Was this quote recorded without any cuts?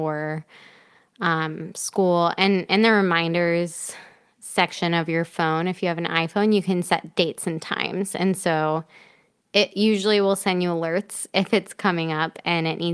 yes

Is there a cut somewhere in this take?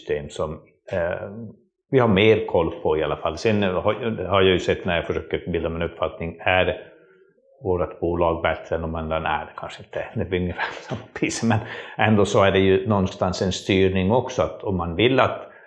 no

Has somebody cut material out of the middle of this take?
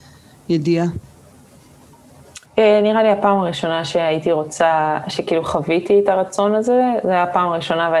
yes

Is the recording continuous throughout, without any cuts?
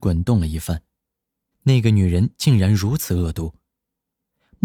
no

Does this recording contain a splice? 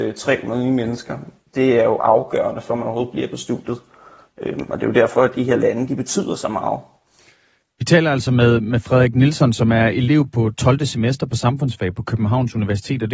no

